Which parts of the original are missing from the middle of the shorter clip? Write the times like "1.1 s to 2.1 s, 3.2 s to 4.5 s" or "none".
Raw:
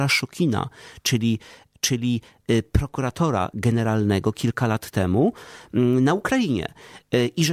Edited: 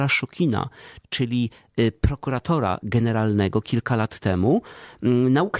1.0 s to 1.7 s